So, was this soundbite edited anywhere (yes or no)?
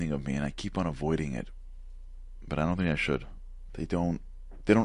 yes